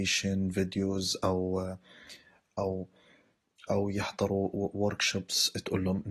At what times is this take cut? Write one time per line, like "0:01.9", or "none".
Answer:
none